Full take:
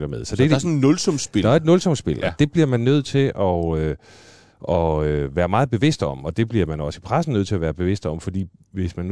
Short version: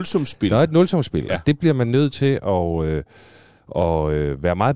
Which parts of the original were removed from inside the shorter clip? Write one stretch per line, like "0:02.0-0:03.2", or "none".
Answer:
none